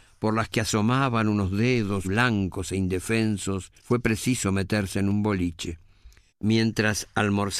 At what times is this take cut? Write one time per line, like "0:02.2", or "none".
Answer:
0:02.0
0:03.8
0:06.3